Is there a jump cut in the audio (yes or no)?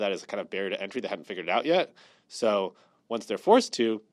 no